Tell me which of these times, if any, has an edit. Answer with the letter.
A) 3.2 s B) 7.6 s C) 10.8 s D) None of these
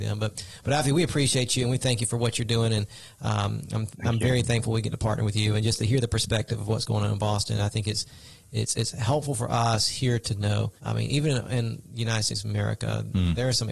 C